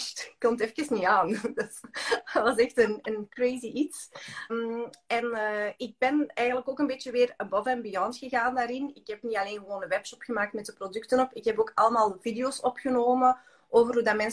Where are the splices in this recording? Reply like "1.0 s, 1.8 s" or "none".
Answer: 4.5 s